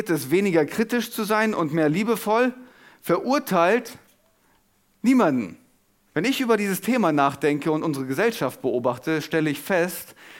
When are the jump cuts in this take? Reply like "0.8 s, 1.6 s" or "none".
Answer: 6.1 s